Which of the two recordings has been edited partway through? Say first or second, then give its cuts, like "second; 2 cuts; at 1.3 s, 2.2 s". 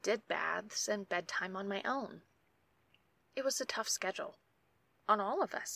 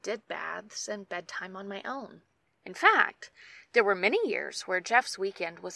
second; 1 cut; at 2.5 s